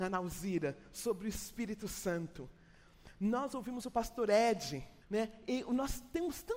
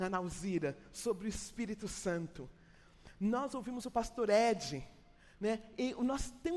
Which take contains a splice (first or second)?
first